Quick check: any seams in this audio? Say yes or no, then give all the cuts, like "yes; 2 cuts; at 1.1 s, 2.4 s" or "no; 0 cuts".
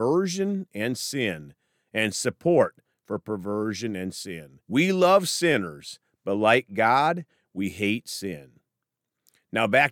yes; 1 cut; at 4.6 s